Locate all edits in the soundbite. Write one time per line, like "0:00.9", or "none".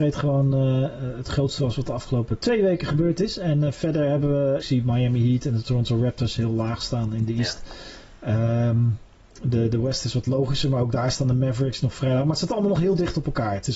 0:04.6